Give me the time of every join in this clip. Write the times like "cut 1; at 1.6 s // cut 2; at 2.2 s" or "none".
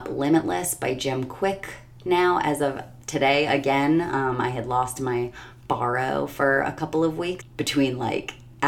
cut 1; at 7.4 s

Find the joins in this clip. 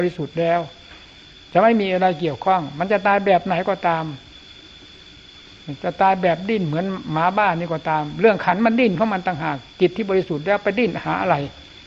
none

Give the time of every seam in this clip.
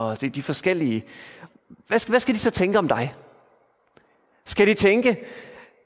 none

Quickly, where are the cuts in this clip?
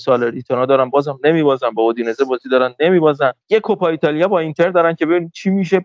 cut 1; at 3.4 s

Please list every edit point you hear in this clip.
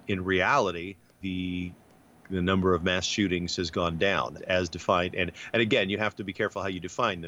cut 1; at 1.2 s // cut 2; at 4.4 s

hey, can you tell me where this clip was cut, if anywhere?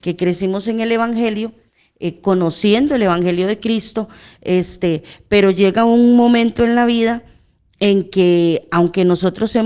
none

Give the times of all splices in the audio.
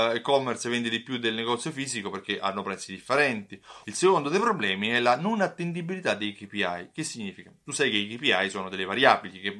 cut 1; at 3.8 s

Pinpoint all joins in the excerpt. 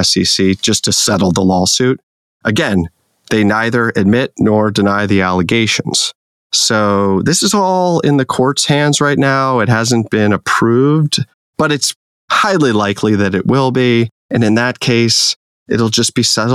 none

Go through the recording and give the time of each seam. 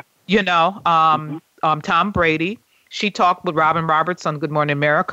none

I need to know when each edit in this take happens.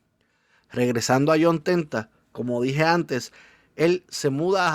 none

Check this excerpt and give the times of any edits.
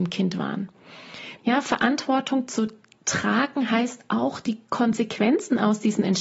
cut 1; at 1.4 s

